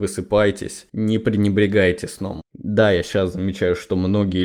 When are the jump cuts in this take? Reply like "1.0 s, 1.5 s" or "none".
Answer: 2.4 s